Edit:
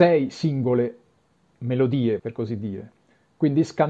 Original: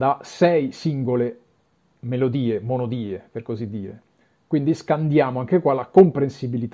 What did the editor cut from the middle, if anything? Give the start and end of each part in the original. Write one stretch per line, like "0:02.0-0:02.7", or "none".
0:02.6-0:03.3